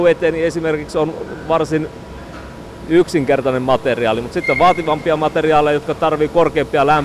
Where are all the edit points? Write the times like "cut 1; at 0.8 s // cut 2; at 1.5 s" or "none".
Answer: none